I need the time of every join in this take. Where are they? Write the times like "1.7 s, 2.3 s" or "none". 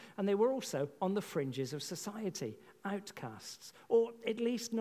none